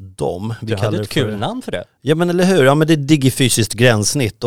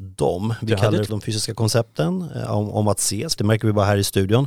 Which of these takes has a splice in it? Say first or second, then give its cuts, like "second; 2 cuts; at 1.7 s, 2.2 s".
second; 2 cuts; at 1.1 s, 3.4 s